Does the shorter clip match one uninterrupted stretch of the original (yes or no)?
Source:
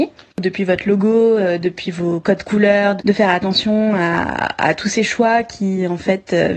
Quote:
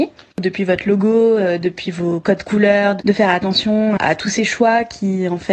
no